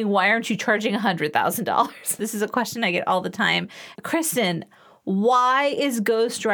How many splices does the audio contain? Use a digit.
2